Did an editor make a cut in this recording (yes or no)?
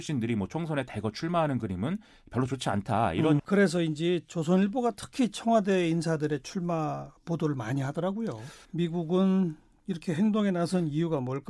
yes